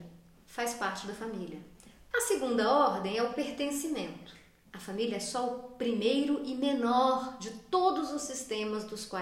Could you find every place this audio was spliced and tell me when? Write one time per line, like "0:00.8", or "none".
0:02.1
0:04.7